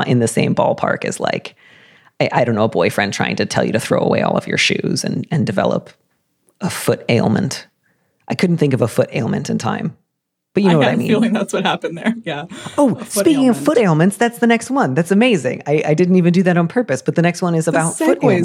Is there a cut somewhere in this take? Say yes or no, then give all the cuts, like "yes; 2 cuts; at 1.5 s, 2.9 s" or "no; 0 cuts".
no; 0 cuts